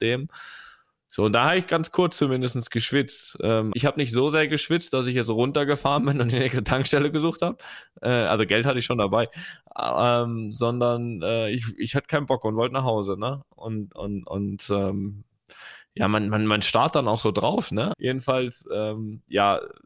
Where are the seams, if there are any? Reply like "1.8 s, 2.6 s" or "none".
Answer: 3.7 s, 17.9 s